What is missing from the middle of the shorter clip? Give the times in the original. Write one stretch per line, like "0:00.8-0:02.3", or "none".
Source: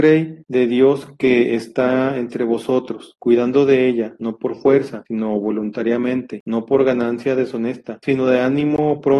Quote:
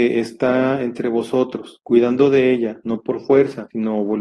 none

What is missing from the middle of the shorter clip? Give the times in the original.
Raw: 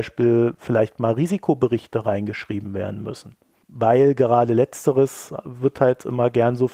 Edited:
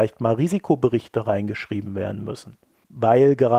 none

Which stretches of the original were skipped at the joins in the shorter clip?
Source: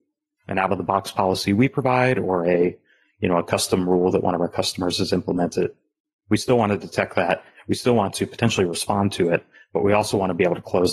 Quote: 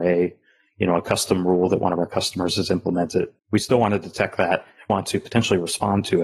0:05.8-0:06.2
0:07.7-0:08.0

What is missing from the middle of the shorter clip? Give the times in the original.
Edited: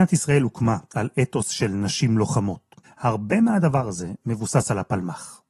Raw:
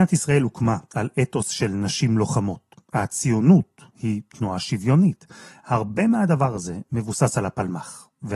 0:02.8-0:05.5

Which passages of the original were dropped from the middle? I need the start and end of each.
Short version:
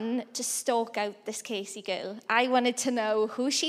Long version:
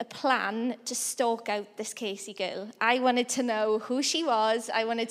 none

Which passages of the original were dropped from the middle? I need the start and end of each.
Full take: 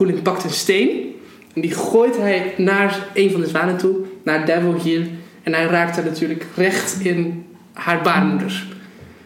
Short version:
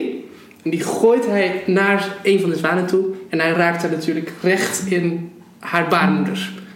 0:04.2-0:05.4

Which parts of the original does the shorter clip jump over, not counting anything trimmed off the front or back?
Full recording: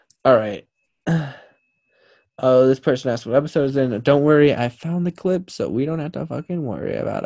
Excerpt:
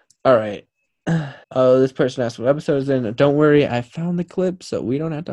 0:01.4-0:02.3

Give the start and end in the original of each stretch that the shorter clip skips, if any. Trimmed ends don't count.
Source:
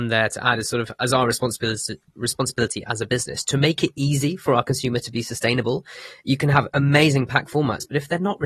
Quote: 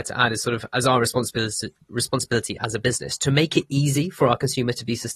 none

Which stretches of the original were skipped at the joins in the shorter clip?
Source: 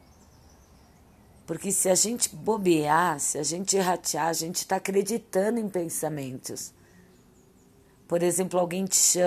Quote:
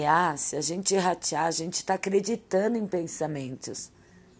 none

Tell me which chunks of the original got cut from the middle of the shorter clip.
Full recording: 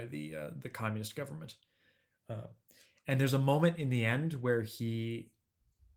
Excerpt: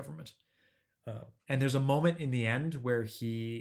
0:02.6-0:03.0

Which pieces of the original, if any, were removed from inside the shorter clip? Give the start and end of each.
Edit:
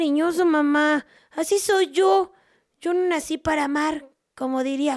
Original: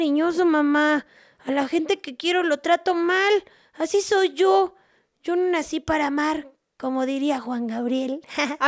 0:01.2-0:03.6

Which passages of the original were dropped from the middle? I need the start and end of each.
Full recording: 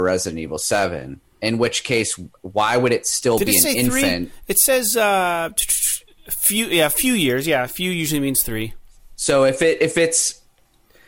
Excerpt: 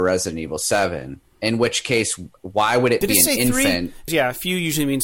0:03.0-0:03.4
0:04.5-0:07.4

